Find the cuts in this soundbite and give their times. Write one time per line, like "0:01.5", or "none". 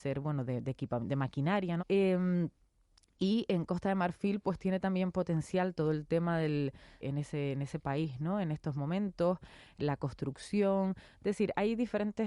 0:01.8
0:07.0

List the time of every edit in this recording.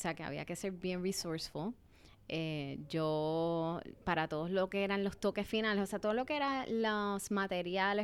none

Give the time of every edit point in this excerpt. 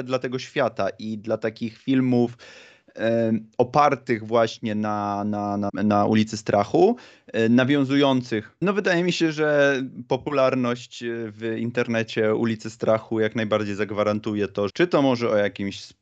0:05.7
0:08.6
0:14.7

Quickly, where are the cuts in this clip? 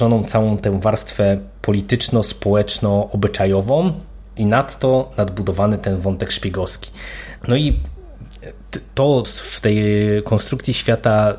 0:07.4
0:09.2

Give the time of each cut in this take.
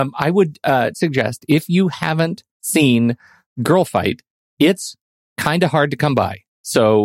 0:00.9
0:02.5

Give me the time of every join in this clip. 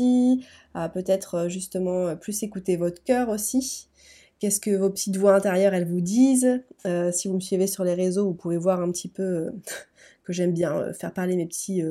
none

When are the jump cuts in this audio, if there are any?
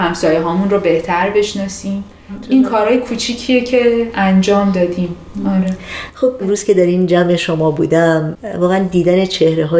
none

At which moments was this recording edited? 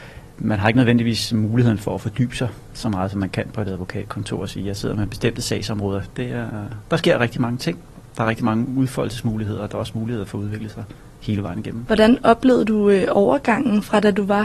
0:06.1
0:11.9

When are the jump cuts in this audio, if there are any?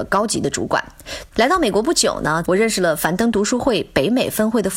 0:01.3
0:02.4

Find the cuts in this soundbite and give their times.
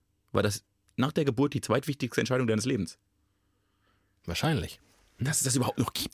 0:05.2

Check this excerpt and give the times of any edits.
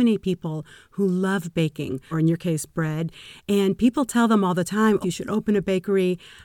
0:02.1
0:05.0

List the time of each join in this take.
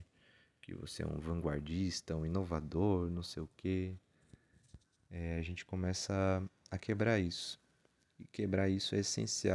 none

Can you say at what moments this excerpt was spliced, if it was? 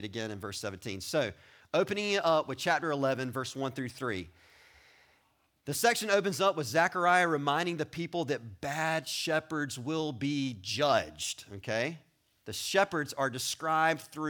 none

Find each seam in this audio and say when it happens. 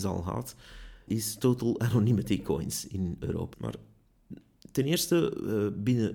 0:01.1
0:03.5

